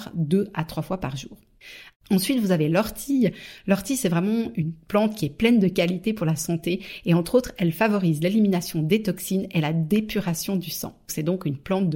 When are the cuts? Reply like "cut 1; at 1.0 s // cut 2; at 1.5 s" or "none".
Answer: cut 1; at 1.9 s

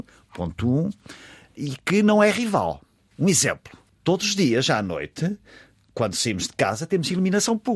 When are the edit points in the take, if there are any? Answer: none

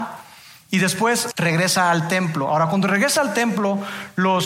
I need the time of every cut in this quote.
cut 1; at 1.3 s

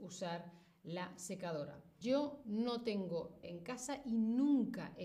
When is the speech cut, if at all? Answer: cut 1; at 2.0 s // cut 2; at 3.4 s

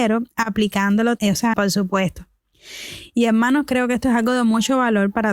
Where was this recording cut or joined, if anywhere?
cut 1; at 1.5 s

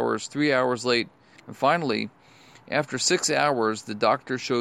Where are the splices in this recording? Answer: cut 1; at 1.4 s

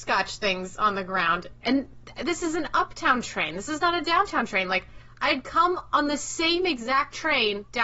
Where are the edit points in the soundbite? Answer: cut 1; at 1.6 s

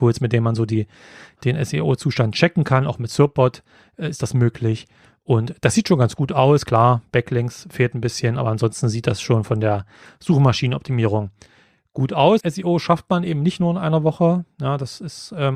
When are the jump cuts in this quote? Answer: cut 1; at 12.4 s

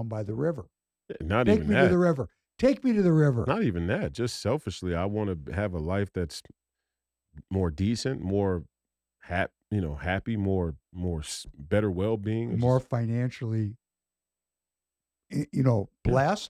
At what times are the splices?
none

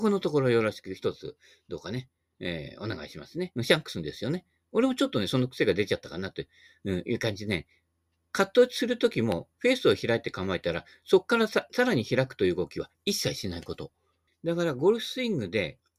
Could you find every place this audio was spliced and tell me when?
cut 1; at 3.6 s // cut 2; at 14.3 s

